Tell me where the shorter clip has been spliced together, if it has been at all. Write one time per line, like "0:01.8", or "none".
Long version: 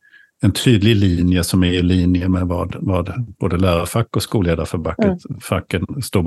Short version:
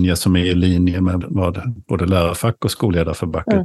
0:01.2

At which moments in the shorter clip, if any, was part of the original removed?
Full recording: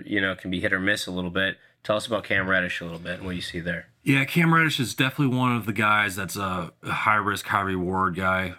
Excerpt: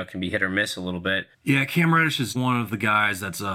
0:01.3
0:02.3

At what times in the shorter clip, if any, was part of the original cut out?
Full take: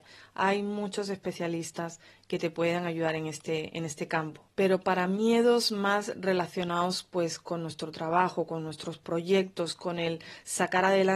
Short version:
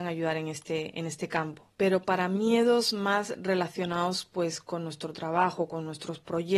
none

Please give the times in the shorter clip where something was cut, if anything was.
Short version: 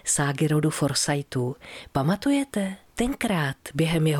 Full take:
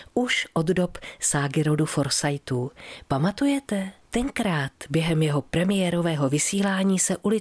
none

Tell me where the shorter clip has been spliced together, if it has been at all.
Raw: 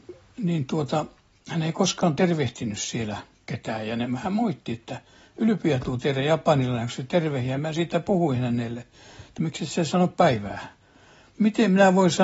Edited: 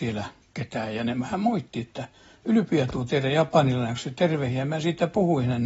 none

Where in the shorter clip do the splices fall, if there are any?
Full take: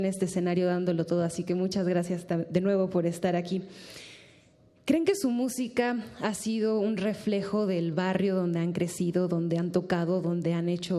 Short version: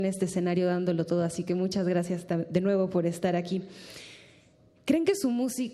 none

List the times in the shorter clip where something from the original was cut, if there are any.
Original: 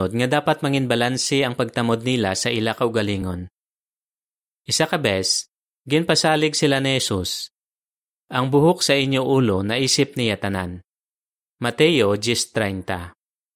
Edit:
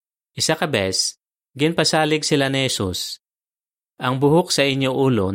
none

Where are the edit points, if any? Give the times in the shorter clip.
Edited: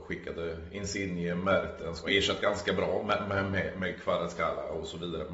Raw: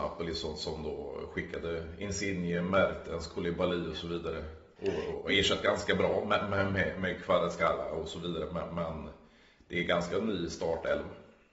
0:02.0

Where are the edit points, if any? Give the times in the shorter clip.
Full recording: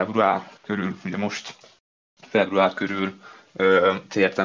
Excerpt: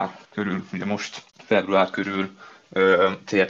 0:01.3

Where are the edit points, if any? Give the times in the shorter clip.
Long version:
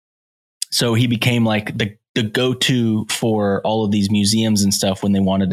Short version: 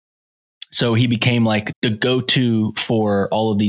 0:01.7

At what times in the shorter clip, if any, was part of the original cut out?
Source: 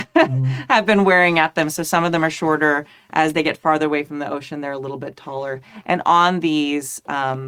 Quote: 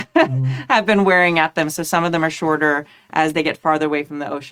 none

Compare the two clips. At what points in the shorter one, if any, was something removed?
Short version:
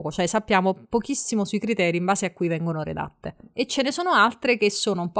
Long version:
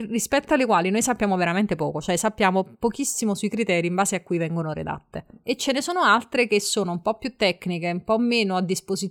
none

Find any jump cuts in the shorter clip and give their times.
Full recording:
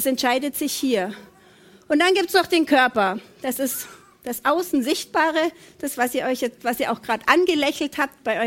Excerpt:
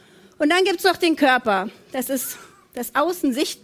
none

